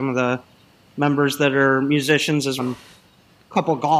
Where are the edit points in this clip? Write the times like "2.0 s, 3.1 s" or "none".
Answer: 2.6 s